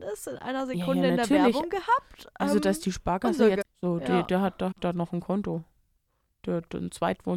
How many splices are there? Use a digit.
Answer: 2